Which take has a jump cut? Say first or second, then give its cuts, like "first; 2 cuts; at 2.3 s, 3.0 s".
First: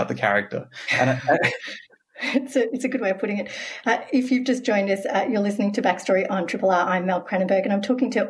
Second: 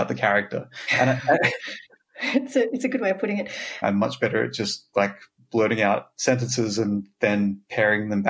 second; 1 cut; at 3.8 s